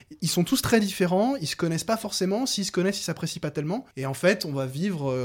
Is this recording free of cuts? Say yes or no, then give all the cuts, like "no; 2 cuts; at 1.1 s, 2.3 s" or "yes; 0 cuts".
no; 1 cut; at 3.9 s